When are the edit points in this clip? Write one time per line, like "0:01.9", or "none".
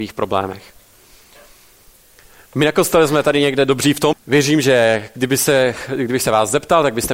0:04.1

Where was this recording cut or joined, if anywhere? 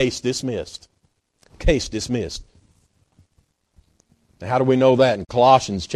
none

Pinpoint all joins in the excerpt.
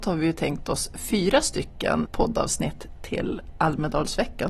0:02.0

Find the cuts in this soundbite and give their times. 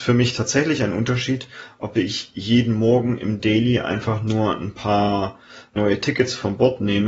none

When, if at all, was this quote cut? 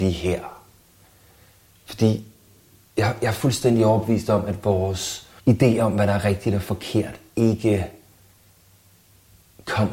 0:05.4

